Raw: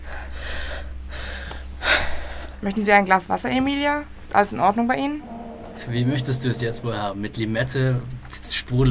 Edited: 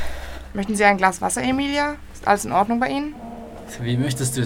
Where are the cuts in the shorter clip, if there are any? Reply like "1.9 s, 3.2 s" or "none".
none